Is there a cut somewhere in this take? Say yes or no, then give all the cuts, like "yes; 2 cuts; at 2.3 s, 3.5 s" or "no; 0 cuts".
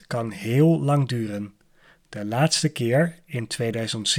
no; 0 cuts